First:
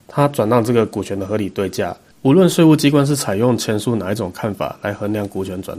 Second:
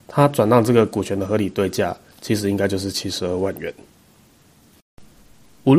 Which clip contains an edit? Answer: first; 1 cut; at 2.1 s

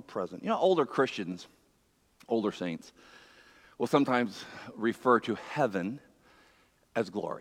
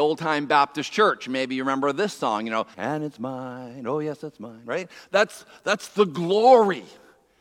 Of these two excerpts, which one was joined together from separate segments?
second; 1 cut; at 2.7 s

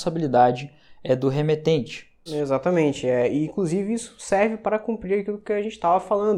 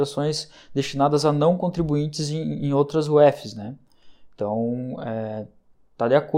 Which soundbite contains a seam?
first; 1 cut; at 2.3 s

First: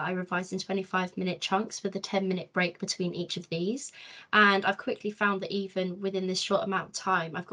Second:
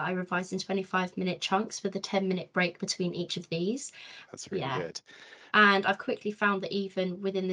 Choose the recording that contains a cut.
second; 2 cuts; at 4.3 s, 5.5 s

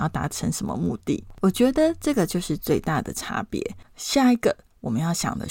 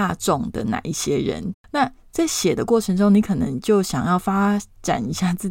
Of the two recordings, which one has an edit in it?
second; 1 cut; at 1.5 s

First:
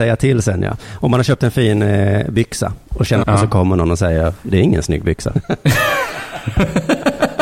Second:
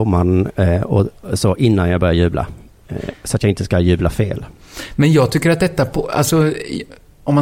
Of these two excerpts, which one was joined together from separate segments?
first; 2 cuts; at 3.2 s, 5.3 s

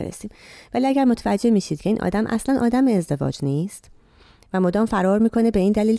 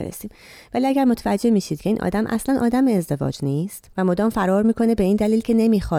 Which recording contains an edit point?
second; 1 cut; at 3.9 s

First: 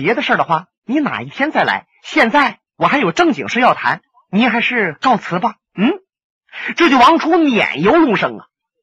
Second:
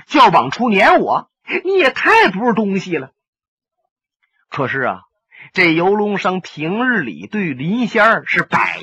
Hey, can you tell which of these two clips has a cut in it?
first; 1 cut; at 2.7 s

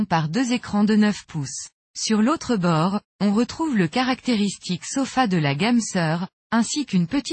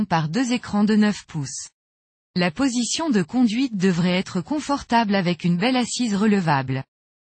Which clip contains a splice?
first; 1 cut; at 1.8 s

